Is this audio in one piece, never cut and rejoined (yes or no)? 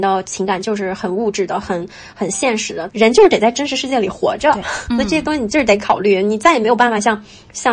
no